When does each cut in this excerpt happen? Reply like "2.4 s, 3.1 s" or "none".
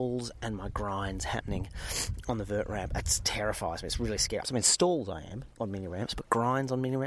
4.4 s, 5.5 s